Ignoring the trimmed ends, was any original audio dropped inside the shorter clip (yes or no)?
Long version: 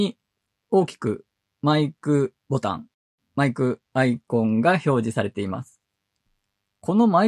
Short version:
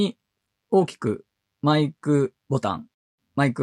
no